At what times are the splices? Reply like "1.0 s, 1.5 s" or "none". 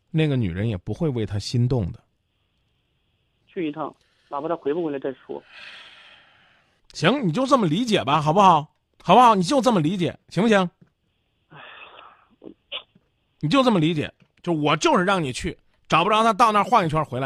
3.4 s